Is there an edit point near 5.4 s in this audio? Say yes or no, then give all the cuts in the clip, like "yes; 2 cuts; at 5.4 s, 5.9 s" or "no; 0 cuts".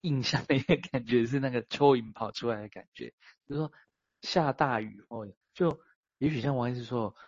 yes; 2 cuts; at 3.4 s, 5.4 s